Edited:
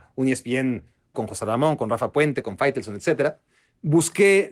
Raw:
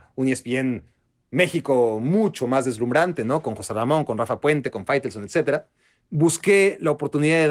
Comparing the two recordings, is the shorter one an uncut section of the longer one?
no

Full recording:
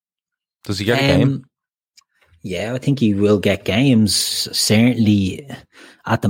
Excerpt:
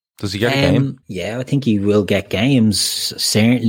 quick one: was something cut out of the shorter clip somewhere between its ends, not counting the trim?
yes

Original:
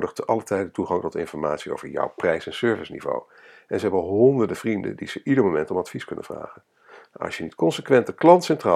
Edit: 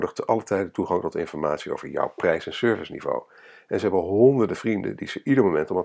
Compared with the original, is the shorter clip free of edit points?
yes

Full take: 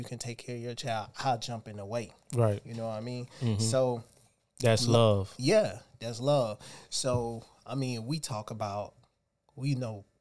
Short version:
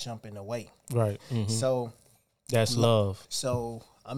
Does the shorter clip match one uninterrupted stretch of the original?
no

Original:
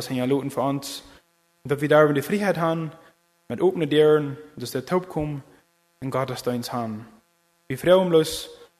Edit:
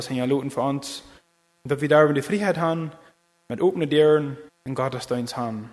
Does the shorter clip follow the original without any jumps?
no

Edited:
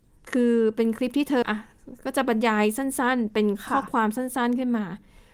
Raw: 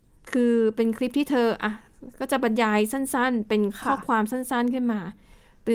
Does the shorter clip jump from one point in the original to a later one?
yes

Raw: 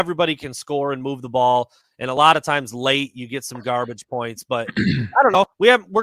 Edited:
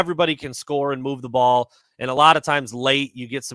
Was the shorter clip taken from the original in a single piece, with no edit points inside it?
yes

